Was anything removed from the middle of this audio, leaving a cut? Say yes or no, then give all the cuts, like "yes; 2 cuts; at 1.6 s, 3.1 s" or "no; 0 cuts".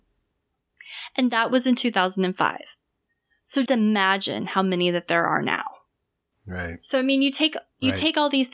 yes; 2 cuts; at 3.7 s, 6.3 s